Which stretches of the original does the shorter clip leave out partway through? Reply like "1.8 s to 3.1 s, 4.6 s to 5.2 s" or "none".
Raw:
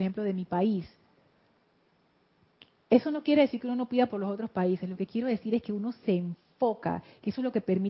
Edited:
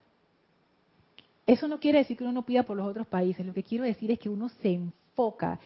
none

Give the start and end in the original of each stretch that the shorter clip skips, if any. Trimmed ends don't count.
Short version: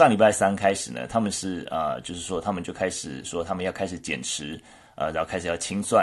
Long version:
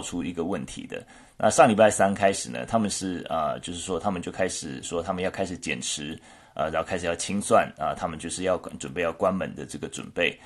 none

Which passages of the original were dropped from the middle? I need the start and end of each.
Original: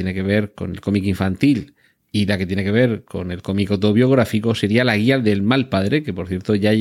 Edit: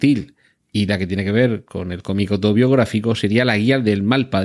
none

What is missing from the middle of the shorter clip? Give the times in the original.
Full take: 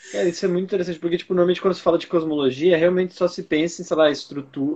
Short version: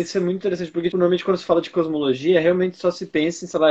1.2 s to 1.3 s

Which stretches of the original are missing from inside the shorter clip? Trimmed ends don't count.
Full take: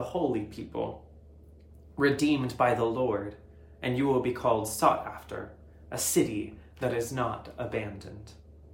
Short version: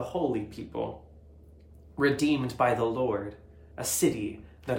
3.7 s to 5.8 s

